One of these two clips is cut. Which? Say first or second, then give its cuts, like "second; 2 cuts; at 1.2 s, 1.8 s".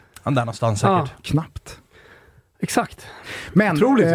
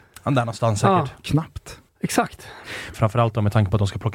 second; 2 cuts; at 1.9 s, 2.9 s